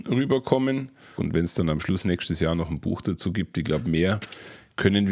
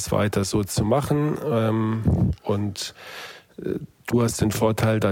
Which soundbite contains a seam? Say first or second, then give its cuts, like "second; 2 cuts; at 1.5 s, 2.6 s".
first; 1 cut; at 1.2 s